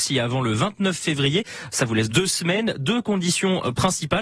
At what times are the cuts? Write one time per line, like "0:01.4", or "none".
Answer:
0:02.1